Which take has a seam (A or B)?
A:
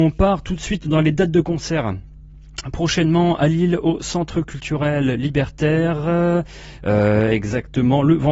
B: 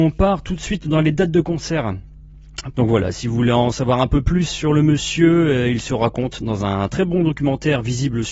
B